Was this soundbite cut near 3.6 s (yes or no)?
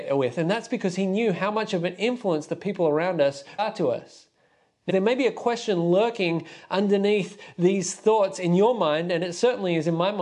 yes